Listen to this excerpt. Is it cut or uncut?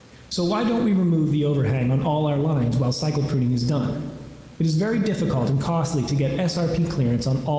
uncut